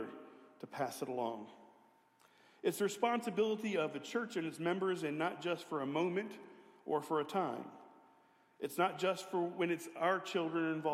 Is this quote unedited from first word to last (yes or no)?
yes